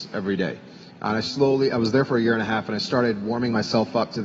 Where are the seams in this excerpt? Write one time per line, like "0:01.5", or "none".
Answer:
none